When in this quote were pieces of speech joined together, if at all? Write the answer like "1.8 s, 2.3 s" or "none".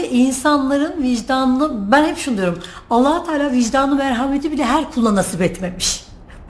none